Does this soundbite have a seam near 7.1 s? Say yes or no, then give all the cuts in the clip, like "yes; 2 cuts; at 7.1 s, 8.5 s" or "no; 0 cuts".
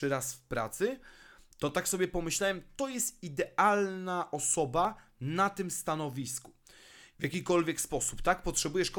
yes; 1 cut; at 7.1 s